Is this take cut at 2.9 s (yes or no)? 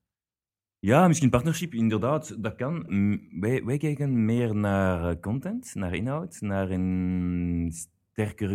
yes